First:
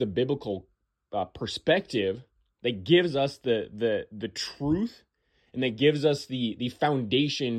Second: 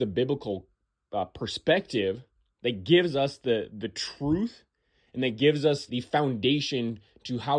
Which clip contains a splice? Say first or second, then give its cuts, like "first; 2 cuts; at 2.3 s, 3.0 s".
second; 2 cuts; at 3.7 s, 5.9 s